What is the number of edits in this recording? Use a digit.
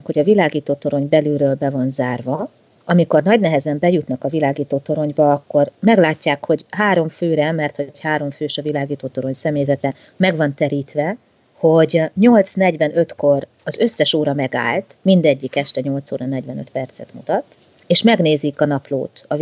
0